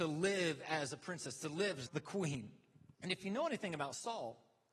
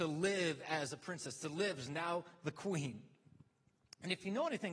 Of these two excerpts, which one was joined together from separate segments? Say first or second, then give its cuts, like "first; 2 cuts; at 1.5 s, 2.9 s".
first; 2 cuts; at 1.9 s, 2.9 s